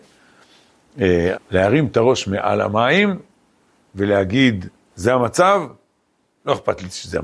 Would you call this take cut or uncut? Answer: cut